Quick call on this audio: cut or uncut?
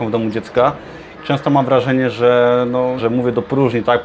cut